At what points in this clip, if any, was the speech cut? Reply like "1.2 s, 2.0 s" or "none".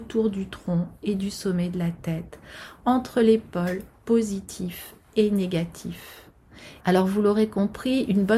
6.8 s

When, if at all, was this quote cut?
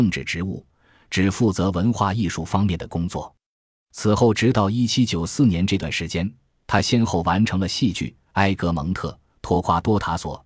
none

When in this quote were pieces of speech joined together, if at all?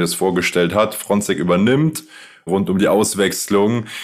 2.5 s

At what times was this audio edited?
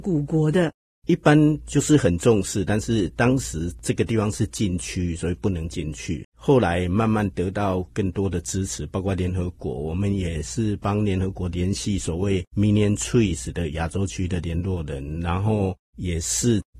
6.2 s

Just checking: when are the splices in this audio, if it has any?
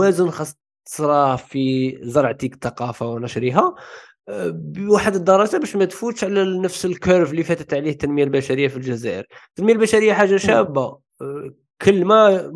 none

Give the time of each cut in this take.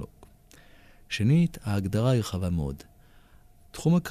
none

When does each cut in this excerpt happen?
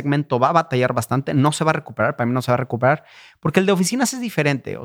none

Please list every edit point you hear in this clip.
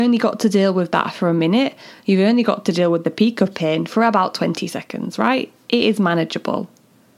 none

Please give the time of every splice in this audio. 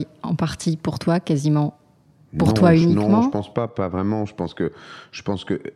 none

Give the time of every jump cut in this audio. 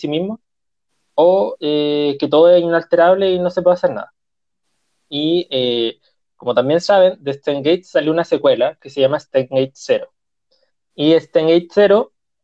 none

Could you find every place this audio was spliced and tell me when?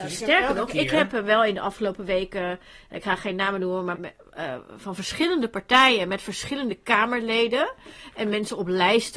3.9 s

